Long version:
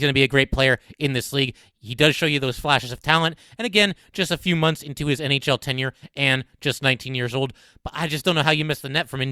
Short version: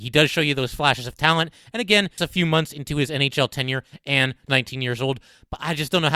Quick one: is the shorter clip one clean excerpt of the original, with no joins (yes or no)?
no